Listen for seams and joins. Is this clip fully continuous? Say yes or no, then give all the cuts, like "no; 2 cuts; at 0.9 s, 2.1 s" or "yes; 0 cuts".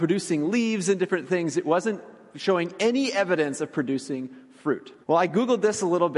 no; 1 cut; at 5.0 s